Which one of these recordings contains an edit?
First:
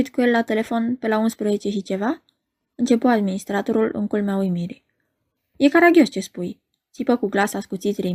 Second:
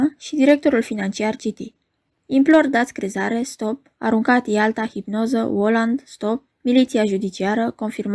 second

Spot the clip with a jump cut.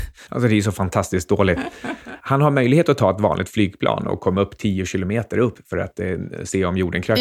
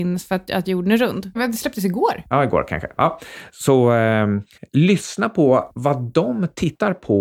second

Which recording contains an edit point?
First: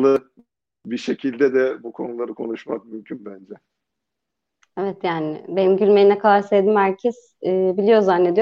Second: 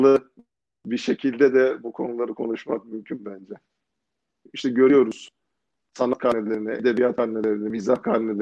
second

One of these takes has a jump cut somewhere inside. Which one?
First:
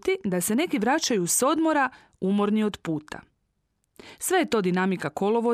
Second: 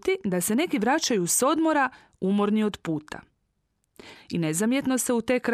second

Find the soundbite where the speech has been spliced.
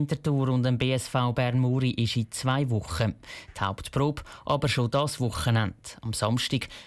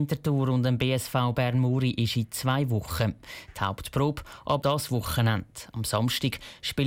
second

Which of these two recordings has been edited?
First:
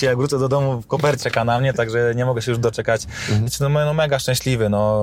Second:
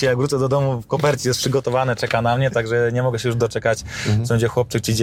first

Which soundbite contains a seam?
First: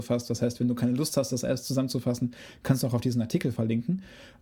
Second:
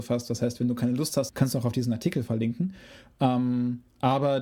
second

